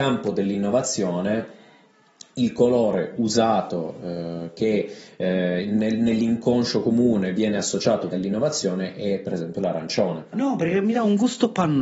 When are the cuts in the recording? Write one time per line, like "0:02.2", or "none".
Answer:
0:08.1
0:10.3